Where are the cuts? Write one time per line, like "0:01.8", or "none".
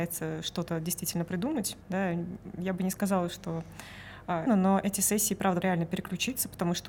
0:01.8
0:04.5
0:05.6